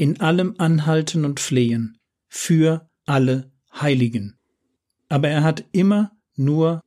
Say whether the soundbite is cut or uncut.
cut